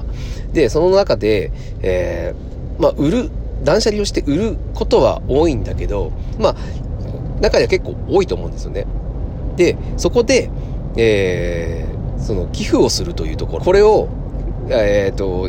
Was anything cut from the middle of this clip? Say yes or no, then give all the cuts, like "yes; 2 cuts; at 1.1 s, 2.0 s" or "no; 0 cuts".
yes; 2 cuts; at 6.4 s, 13.6 s